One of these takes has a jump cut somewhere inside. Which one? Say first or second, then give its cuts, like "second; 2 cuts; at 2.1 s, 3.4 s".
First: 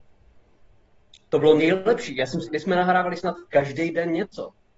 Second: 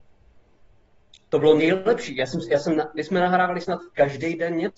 first; 1 cut; at 2.5 s